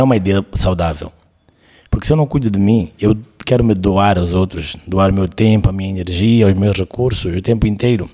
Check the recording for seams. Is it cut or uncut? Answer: uncut